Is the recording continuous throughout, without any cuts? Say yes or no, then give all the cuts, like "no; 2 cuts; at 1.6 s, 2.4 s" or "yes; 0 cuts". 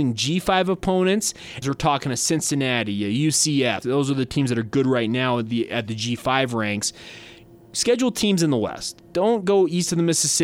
no; 2 cuts; at 1.6 s, 3.8 s